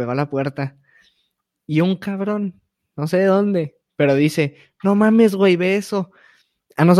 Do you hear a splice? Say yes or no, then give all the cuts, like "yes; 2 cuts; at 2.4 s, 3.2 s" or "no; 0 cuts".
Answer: yes; 1 cut; at 1.5 s